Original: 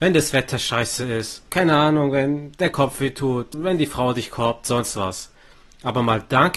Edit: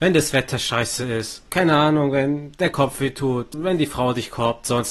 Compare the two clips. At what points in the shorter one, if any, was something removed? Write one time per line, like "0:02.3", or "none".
none